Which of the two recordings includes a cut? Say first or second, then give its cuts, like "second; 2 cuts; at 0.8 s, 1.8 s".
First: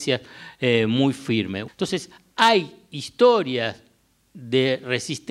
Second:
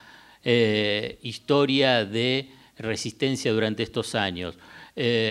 first; 1 cut; at 1.7 s